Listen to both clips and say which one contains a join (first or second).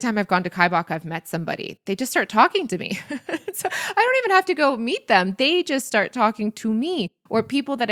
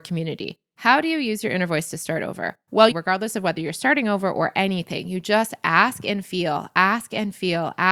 second